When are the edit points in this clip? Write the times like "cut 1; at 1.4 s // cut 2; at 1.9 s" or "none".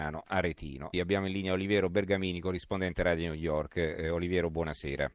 cut 1; at 0.9 s